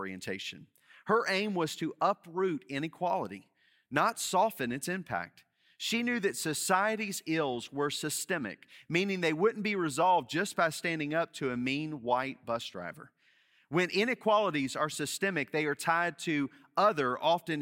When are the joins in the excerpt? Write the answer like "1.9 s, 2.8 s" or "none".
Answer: none